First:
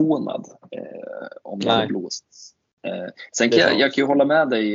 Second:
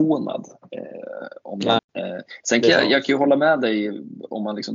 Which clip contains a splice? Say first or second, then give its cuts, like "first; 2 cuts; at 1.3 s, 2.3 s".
second; 1 cut; at 1.8 s